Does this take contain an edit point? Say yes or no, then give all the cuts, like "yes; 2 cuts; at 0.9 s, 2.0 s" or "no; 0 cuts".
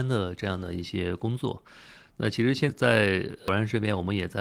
yes; 1 cut; at 2.7 s